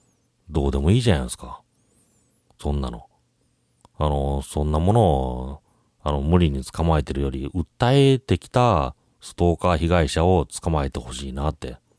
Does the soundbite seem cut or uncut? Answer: uncut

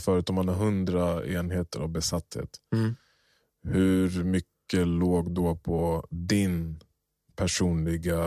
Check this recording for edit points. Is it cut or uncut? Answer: uncut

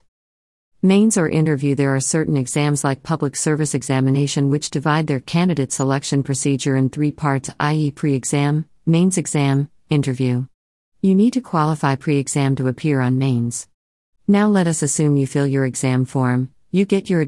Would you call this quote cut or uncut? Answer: cut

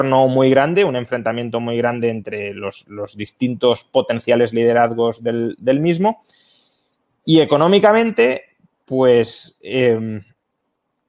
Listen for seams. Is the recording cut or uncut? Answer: uncut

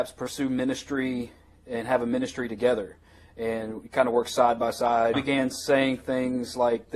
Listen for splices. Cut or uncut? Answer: cut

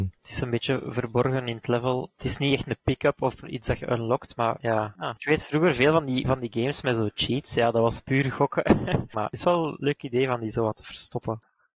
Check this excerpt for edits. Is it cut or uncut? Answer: cut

